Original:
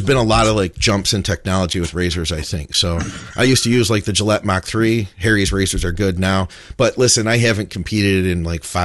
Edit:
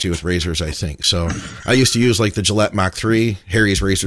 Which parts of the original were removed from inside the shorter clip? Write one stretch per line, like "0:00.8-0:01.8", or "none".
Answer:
none